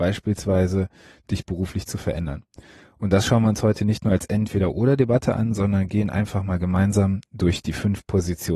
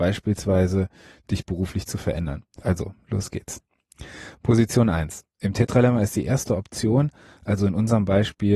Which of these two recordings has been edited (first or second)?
second